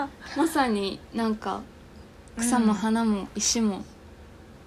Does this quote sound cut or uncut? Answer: cut